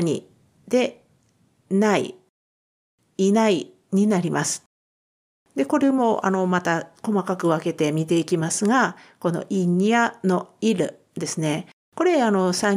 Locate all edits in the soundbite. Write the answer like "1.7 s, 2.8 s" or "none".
none